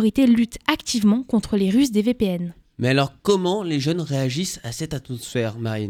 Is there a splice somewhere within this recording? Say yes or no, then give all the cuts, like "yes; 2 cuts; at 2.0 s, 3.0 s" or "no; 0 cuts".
no; 0 cuts